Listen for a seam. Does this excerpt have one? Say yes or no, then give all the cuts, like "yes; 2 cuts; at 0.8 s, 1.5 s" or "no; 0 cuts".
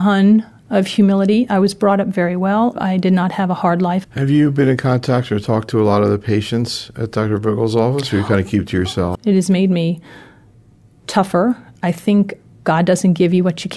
yes; 2 cuts; at 4.0 s, 9.1 s